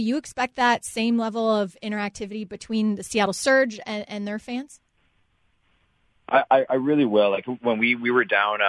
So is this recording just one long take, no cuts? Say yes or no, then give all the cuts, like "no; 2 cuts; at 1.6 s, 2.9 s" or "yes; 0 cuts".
yes; 0 cuts